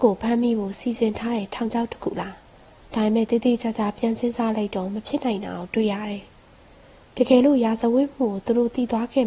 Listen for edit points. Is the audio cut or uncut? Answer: cut